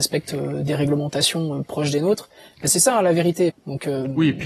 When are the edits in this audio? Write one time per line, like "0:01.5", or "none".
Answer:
0:03.5